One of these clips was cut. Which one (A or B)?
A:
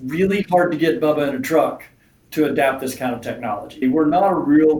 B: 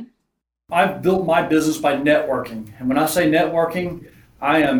A